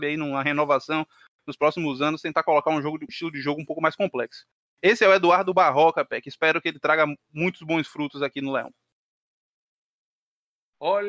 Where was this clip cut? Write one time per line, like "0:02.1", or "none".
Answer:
0:03.1